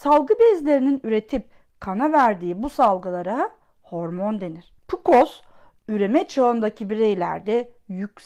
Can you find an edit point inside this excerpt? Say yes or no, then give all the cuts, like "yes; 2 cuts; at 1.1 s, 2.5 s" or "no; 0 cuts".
yes; 1 cut; at 4.8 s